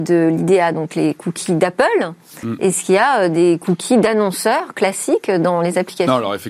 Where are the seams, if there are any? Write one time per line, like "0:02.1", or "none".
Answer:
none